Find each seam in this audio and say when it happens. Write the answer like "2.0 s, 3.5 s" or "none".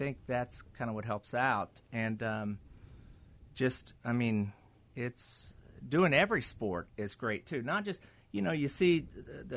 none